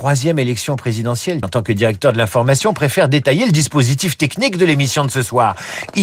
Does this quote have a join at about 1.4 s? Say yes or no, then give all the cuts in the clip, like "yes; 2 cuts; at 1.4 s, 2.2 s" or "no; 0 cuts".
yes; 1 cut; at 1.4 s